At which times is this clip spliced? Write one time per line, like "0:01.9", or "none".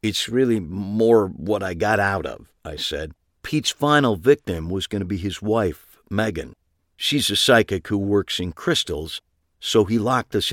none